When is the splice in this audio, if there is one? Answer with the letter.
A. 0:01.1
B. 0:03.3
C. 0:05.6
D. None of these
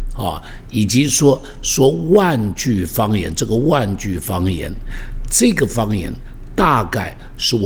D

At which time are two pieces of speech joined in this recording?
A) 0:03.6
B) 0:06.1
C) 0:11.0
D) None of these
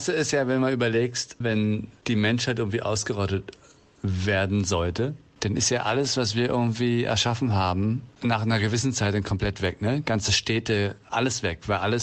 D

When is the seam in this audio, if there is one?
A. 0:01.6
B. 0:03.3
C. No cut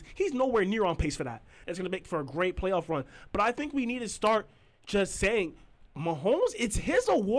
A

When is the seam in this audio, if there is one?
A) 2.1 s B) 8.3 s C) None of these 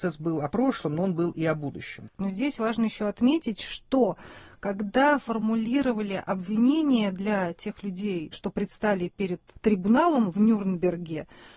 A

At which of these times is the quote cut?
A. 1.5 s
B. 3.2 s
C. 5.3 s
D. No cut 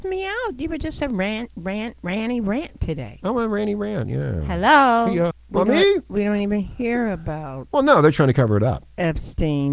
C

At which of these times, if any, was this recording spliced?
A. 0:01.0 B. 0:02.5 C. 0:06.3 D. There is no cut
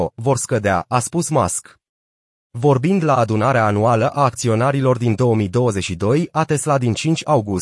B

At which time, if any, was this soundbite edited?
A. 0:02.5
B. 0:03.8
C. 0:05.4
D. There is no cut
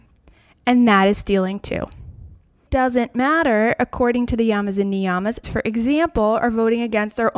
C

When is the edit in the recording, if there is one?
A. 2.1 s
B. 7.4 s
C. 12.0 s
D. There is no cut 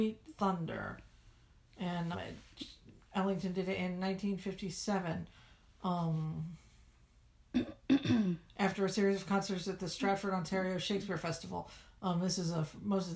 A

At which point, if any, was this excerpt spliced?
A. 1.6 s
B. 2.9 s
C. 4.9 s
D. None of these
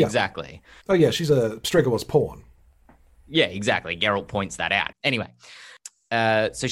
C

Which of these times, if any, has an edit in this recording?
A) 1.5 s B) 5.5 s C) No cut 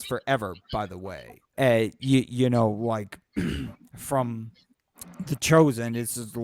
A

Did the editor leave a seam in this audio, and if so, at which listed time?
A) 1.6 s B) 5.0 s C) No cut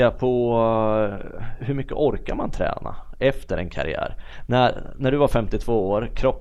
A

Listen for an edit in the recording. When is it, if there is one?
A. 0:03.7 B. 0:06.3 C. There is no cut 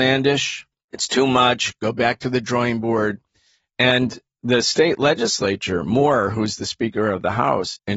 A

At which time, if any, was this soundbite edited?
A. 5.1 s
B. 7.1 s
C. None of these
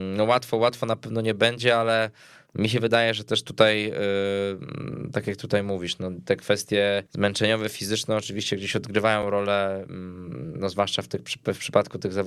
B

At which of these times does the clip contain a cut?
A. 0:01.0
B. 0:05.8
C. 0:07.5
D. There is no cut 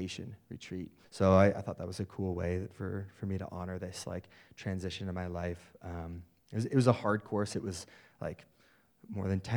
A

